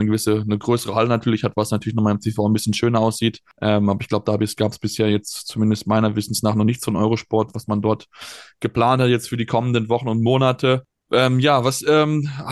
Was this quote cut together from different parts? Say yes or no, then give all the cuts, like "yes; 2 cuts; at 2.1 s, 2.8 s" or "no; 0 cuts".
no; 0 cuts